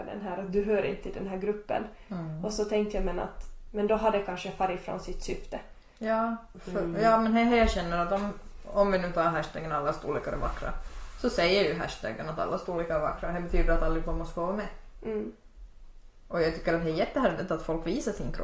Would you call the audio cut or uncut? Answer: uncut